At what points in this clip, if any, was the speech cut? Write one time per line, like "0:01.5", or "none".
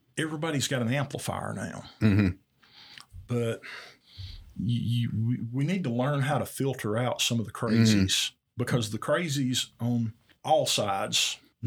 0:03.3